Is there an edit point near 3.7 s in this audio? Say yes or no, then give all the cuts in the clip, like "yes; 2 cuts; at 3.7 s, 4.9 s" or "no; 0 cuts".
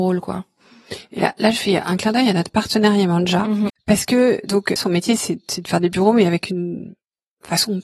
yes; 2 cuts; at 3.7 s, 4.8 s